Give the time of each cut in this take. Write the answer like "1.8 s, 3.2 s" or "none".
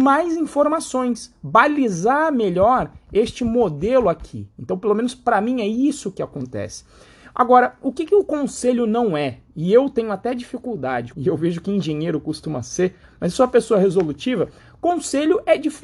11.1 s, 13.0 s